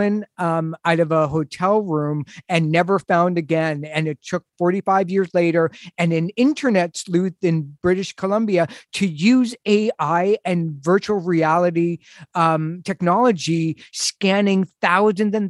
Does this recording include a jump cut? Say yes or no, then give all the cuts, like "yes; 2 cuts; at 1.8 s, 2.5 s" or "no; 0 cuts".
no; 0 cuts